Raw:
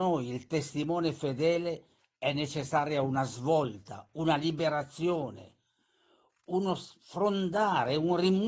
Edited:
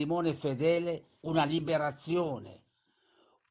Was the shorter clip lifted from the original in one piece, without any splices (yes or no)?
no